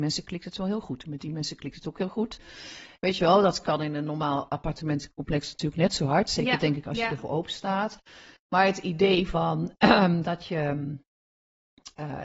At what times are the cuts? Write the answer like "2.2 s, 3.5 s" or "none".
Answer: none